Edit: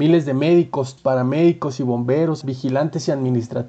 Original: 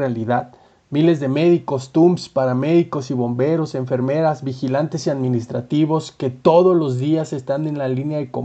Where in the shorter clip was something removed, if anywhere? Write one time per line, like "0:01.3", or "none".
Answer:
0:01.0
0:02.4